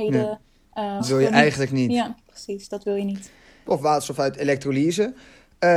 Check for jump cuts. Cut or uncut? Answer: cut